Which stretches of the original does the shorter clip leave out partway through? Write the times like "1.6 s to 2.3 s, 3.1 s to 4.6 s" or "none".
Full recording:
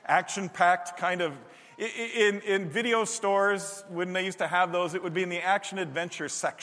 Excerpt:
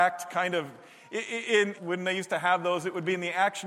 2.4 s to 3.8 s